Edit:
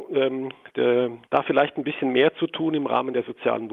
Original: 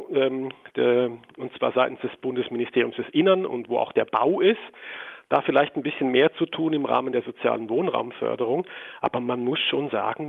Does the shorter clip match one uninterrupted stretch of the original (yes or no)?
no